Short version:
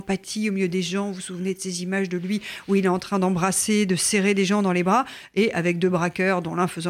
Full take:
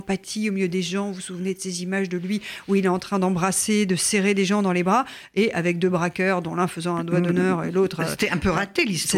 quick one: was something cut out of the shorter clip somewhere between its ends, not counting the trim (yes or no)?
no